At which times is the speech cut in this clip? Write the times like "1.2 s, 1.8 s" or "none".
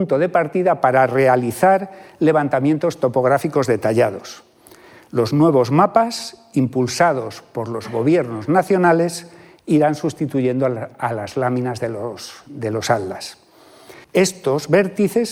14.0 s